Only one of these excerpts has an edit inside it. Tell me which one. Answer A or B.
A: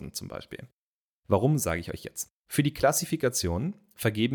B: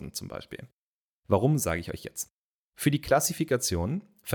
A